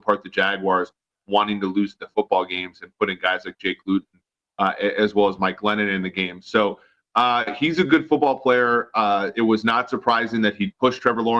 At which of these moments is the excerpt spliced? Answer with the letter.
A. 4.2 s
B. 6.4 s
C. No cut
C